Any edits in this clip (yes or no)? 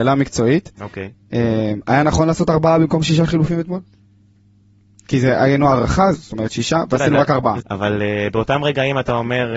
yes